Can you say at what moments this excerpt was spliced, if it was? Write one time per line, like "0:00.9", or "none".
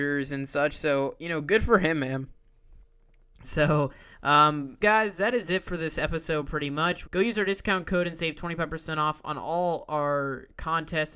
0:03.4
0:04.8
0:07.1